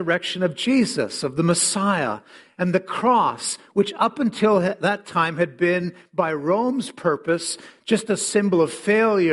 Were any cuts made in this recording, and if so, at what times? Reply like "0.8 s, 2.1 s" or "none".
none

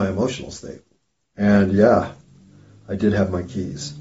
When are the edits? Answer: 1.2 s

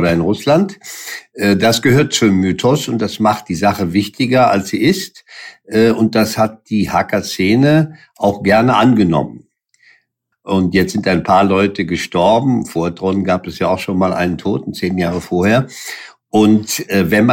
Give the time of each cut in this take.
10.3 s

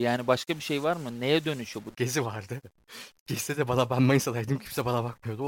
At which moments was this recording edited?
1.9 s

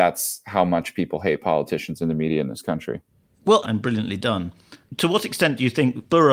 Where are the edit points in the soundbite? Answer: 3.6 s

